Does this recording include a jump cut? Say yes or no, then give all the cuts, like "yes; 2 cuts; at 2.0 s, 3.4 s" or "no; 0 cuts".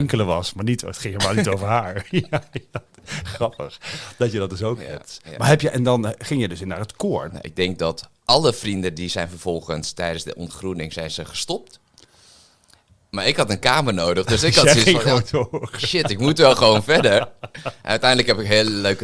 yes; 1 cut; at 7.3 s